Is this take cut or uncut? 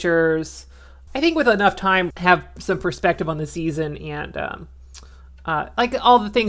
cut